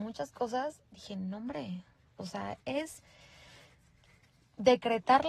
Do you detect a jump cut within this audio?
yes; 1 cut; at 2.6 s

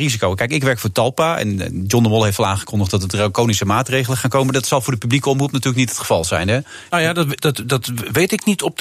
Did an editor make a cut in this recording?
no; 0 cuts

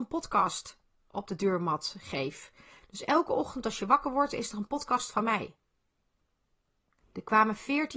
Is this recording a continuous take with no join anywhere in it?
no; 1 cut; at 7.0 s

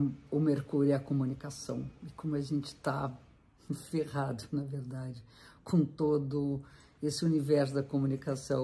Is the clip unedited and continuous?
yes; 0 cuts

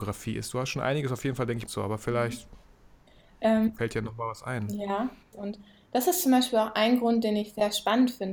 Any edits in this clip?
yes; 2 cuts; at 1.7 s, 5.3 s

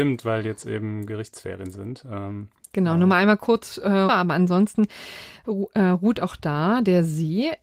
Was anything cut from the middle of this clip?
yes; 1 cut; at 4.1 s

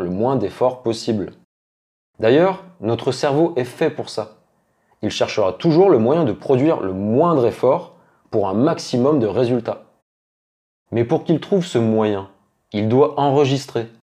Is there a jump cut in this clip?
no; 0 cuts

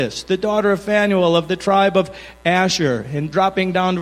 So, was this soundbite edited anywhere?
no; 0 cuts

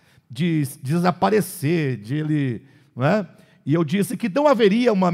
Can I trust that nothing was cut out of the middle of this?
yes; 0 cuts

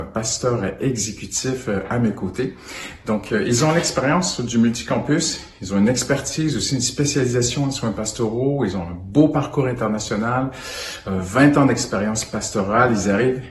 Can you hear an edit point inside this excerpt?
no; 0 cuts

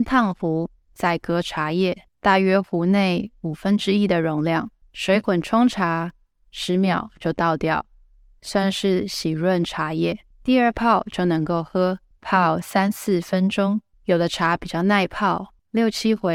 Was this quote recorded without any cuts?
yes; 0 cuts

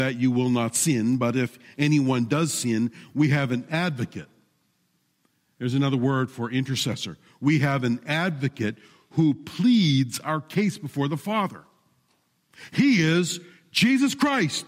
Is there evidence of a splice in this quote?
no; 0 cuts

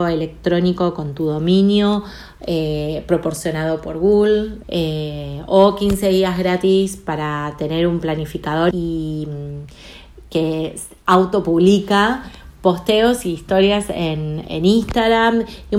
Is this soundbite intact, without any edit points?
no; 2 cuts; at 4.6 s, 8.7 s

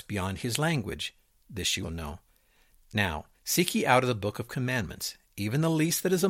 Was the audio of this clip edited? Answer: yes; 2 cuts; at 1.8 s, 3.3 s

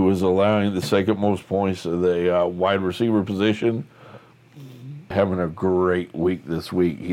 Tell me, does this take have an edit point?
yes; 1 cut; at 5.1 s

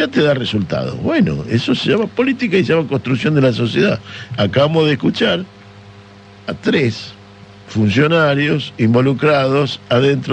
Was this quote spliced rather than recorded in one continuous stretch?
no; 0 cuts

